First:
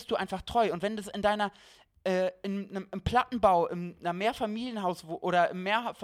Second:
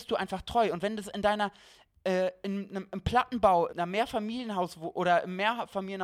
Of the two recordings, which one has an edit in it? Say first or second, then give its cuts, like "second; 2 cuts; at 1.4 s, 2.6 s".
second; 1 cut; at 3.7 s